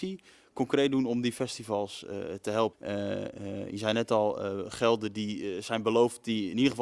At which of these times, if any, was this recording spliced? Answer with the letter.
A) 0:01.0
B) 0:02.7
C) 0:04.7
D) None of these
B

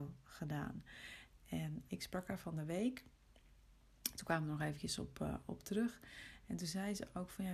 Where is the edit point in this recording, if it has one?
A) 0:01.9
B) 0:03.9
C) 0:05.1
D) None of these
A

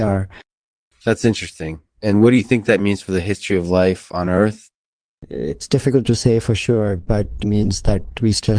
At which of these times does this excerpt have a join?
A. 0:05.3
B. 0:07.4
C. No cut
B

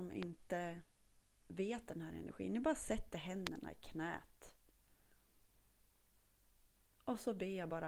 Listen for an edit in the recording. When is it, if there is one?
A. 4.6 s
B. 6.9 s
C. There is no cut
C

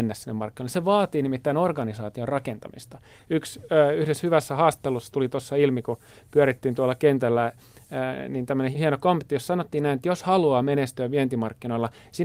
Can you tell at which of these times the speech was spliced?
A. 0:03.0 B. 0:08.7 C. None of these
B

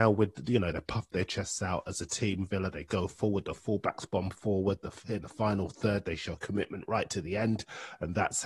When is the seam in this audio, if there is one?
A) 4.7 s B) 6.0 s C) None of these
C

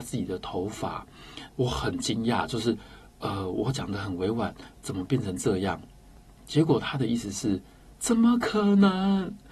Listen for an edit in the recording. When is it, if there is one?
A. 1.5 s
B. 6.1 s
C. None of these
A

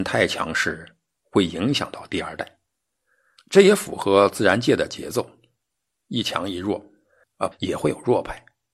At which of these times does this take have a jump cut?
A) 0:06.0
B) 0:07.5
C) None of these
B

